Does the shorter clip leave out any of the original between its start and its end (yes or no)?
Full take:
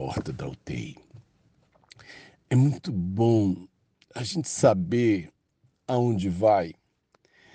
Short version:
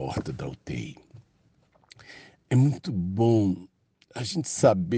no